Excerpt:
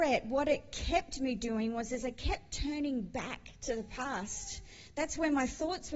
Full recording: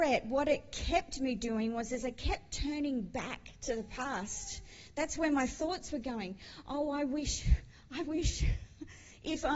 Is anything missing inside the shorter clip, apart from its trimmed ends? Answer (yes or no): no